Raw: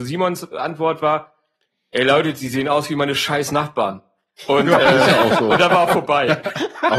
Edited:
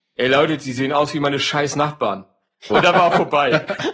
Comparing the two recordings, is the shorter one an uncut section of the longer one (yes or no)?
no